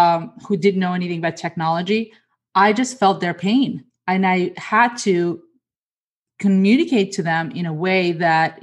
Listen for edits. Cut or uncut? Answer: uncut